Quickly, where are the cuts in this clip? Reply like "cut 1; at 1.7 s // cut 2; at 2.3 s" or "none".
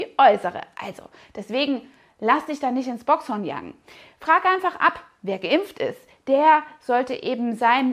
none